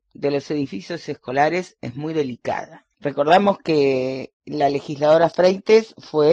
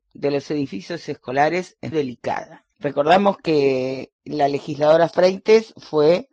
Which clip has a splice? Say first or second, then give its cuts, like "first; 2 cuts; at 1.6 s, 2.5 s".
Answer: second; 1 cut; at 1.9 s